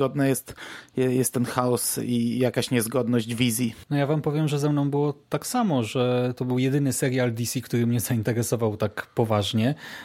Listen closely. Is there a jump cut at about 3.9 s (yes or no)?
yes